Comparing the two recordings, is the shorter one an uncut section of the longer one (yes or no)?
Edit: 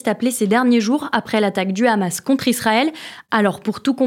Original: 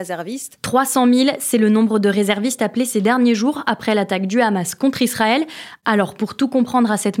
yes